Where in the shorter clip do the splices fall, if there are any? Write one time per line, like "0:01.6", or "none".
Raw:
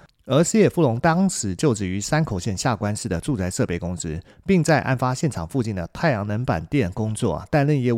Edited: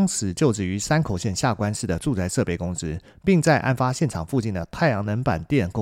none

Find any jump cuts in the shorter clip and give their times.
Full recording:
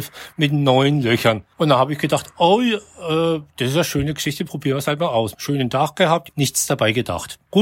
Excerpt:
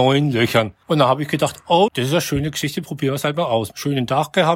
0:01.9

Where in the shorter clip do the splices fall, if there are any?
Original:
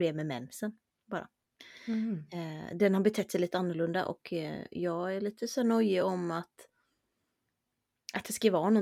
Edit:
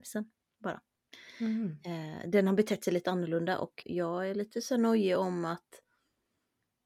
0:03.8

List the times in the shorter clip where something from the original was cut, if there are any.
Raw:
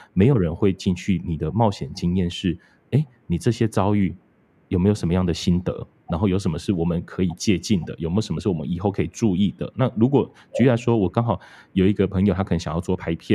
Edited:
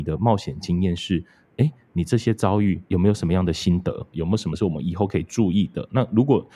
0:02.9
0:04.1

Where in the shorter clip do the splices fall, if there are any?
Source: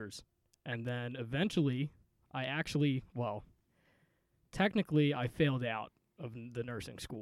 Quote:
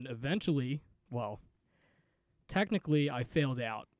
0:01.1

